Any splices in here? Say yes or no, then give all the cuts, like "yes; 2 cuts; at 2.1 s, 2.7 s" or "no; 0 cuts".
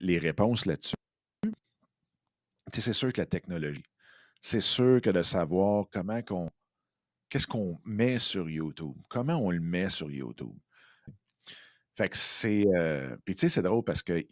yes; 1 cut; at 11.1 s